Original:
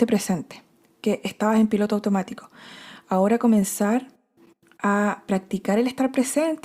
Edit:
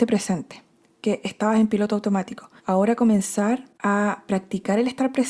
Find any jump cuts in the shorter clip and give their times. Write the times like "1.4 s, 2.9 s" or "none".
2.6 s, 3.7 s